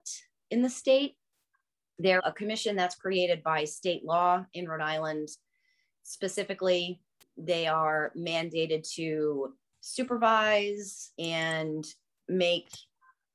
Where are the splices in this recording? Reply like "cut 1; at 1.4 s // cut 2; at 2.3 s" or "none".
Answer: cut 1; at 2.2 s // cut 2; at 11.2 s